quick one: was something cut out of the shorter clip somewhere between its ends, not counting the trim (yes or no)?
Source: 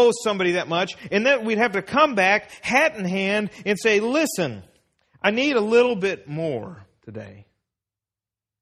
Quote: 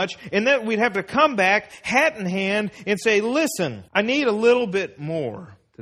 yes